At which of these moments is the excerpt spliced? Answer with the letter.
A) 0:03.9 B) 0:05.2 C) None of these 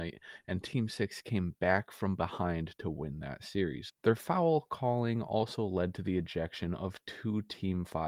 A